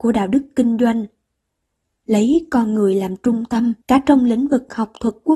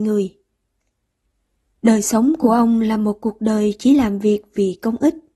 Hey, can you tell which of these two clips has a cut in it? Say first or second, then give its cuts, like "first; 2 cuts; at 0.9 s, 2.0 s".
first; 1 cut; at 3.8 s